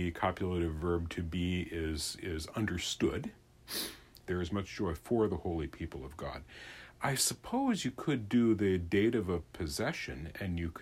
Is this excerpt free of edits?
no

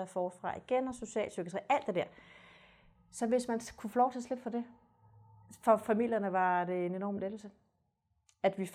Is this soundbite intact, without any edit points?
yes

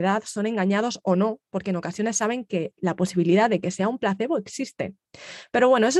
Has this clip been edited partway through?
no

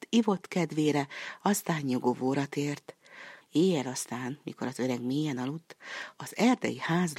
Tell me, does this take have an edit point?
yes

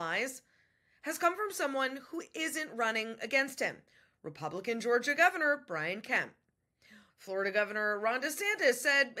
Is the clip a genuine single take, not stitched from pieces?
no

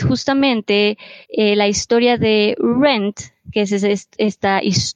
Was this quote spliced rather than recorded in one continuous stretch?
yes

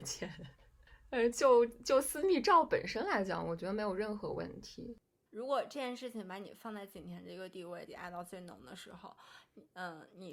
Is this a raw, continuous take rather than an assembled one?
no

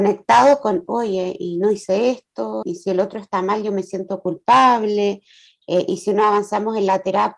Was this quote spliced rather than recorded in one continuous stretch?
yes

